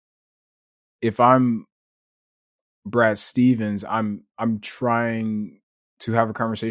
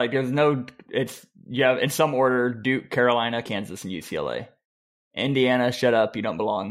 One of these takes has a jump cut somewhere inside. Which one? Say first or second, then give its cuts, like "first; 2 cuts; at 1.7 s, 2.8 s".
second; 1 cut; at 3.4 s